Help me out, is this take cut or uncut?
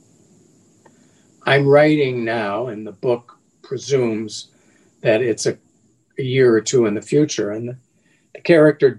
uncut